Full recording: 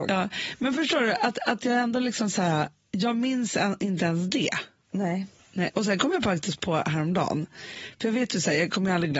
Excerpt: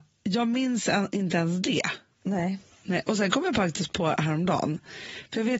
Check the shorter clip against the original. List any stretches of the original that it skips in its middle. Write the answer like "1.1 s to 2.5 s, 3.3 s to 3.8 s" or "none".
none